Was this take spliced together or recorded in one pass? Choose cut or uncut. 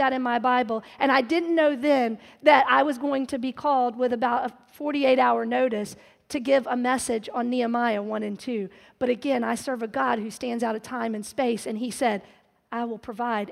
uncut